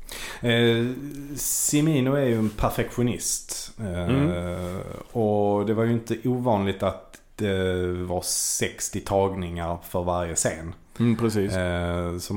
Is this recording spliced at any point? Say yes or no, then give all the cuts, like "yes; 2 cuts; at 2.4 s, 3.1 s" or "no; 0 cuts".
no; 0 cuts